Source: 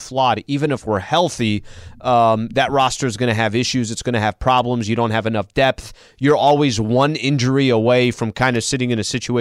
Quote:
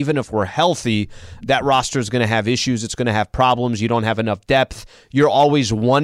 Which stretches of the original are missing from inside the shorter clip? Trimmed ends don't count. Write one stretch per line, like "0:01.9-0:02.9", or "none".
0:02.0-0:02.5